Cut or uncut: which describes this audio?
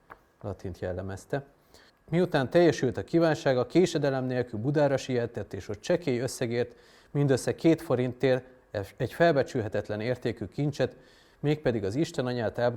cut